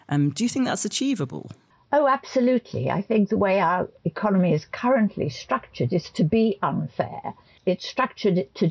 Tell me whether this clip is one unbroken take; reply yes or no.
yes